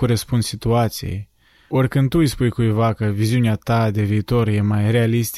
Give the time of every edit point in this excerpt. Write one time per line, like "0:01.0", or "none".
none